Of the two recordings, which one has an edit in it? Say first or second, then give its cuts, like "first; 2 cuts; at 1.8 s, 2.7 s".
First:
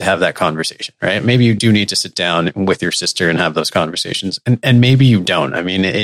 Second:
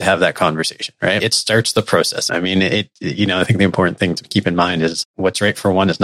second; 3 cuts; at 1.2 s, 2.3 s, 5.0 s